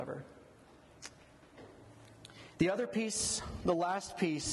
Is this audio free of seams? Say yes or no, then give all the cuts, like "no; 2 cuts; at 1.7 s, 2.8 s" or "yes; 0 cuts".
yes; 0 cuts